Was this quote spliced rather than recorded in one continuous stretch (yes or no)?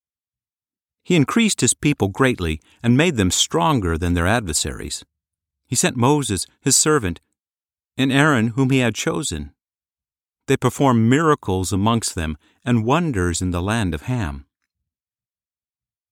yes